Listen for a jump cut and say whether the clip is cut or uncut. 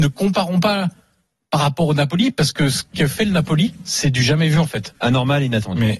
cut